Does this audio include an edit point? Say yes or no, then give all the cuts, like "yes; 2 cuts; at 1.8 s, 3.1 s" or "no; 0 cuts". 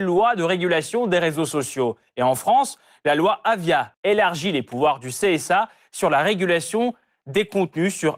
yes; 1 cut; at 3.9 s